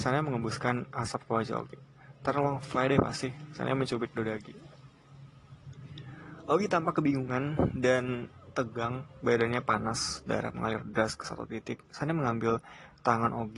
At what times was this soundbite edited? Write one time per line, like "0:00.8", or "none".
none